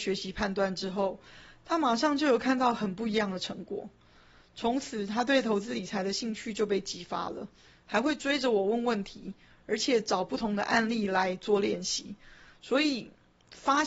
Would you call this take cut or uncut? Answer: uncut